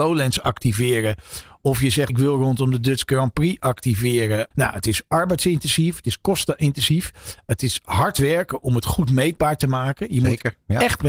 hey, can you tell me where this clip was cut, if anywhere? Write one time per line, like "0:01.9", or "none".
0:02.1
0:04.5